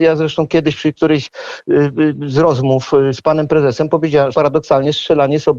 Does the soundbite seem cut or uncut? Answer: cut